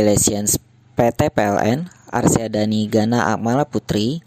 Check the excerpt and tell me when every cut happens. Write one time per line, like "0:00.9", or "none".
none